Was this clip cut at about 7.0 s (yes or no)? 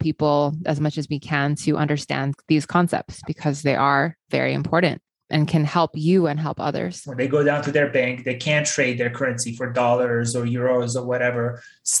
yes